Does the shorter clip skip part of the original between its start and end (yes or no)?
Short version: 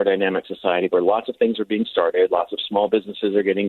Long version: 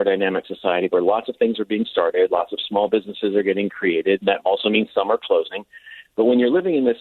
no